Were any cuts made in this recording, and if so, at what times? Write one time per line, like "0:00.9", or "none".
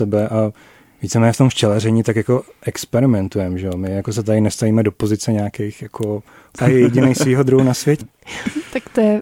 0:06.6
0:08.0